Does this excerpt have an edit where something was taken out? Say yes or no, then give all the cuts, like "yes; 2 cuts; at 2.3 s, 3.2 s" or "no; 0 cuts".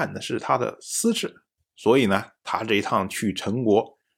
yes; 1 cut; at 1.6 s